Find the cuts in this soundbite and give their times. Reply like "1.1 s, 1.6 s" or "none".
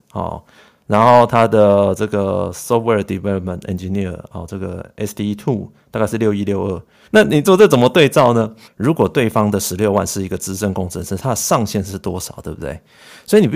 7.1 s, 8.7 s